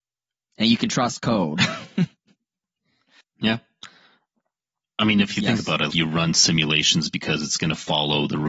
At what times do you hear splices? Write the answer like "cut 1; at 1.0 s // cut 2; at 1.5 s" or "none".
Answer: cut 1; at 5.9 s